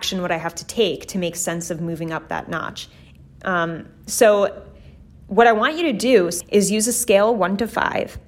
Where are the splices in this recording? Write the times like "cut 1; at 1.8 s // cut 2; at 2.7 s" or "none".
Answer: none